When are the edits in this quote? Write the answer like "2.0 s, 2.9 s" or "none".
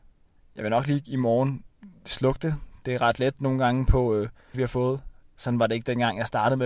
4.5 s